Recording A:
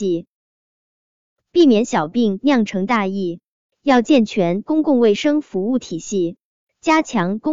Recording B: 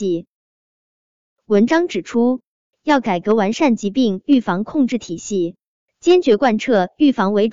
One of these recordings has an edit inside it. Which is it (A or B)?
A